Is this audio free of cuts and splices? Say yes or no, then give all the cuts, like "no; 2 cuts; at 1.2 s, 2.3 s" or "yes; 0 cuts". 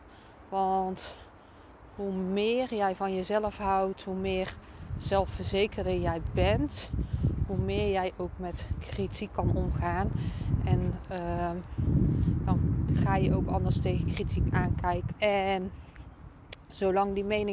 no; 2 cuts; at 12.9 s, 15.1 s